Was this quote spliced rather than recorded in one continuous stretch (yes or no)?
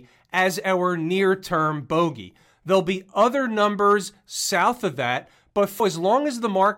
yes